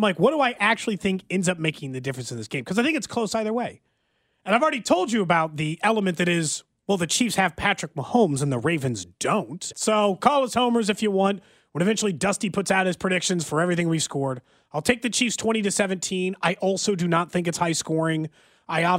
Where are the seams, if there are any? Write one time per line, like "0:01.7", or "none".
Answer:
0:09.7